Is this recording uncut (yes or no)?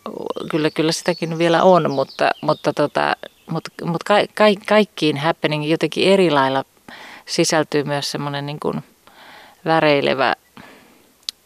yes